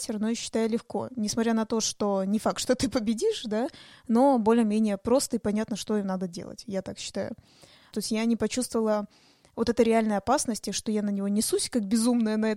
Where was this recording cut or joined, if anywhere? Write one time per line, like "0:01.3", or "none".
0:07.9